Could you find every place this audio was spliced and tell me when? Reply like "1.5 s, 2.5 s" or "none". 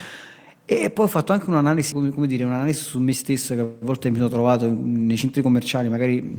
1.9 s